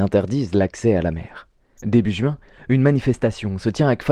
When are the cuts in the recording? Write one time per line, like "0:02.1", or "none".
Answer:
0:01.8